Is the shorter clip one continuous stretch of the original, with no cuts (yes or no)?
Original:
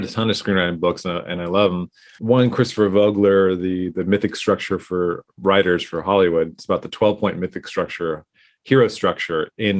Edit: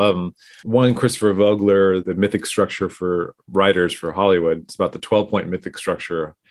no